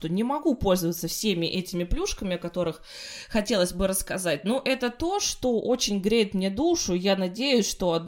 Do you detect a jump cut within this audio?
no; 0 cuts

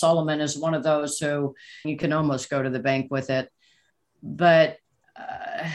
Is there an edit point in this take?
yes; 1 cut; at 1.8 s

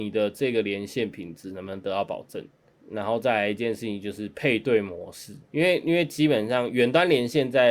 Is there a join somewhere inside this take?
yes; 2 cuts; at 2.8 s, 5.4 s

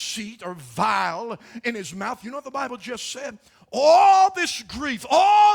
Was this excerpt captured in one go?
yes; 0 cuts

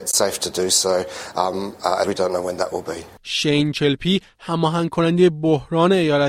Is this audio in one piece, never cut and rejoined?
no; 2 cuts; at 2.0 s, 3.2 s

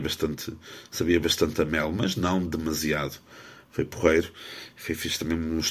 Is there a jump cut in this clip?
no; 0 cuts

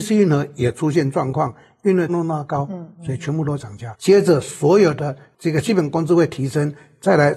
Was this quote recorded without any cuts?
no; 2 cuts; at 2.1 s, 3.9 s

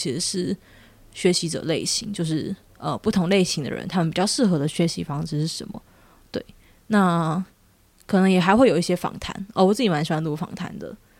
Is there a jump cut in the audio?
no; 0 cuts

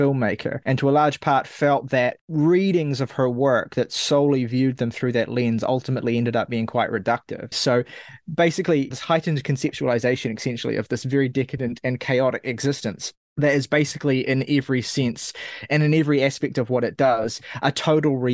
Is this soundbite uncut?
no; 2 cuts; at 7.5 s, 8.9 s

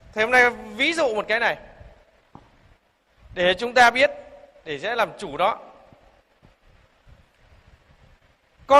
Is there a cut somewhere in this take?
no; 0 cuts

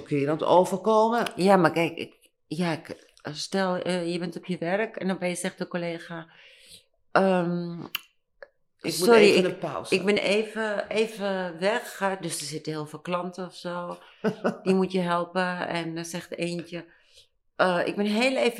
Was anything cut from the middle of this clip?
no; 0 cuts

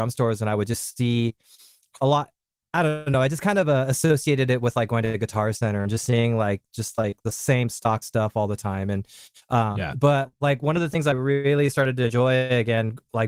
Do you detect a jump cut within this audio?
no; 0 cuts

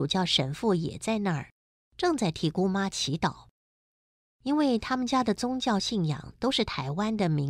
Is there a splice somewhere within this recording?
yes; 1 cut; at 4.3 s

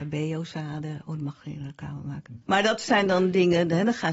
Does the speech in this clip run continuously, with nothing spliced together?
no; 1 cut; at 2.4 s

